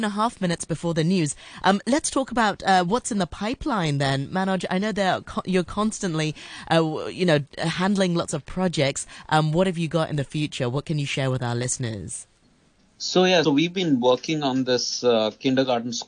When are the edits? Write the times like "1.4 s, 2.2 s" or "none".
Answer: 13.4 s